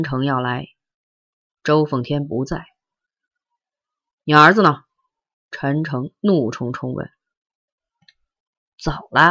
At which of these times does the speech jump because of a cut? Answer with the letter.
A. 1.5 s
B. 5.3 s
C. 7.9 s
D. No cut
D